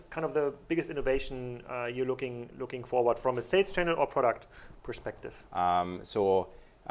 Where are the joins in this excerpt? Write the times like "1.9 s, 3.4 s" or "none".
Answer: 5.5 s

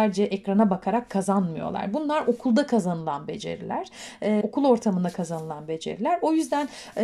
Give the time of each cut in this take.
4.4 s

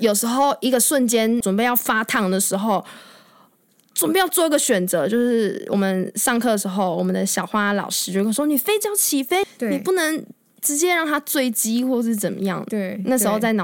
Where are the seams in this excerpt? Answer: 1.4 s, 9.4 s

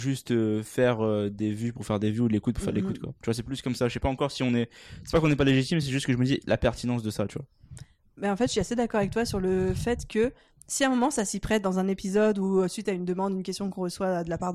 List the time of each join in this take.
none

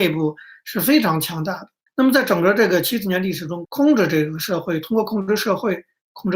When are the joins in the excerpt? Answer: 1.9 s, 3.6 s

